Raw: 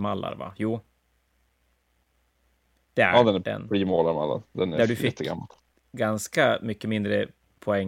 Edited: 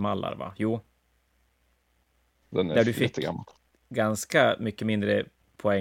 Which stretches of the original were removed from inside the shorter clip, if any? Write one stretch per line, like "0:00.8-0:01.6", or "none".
0:02.4-0:04.4